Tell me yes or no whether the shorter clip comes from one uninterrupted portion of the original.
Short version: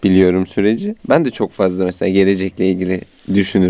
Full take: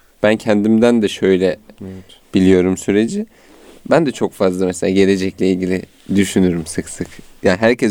no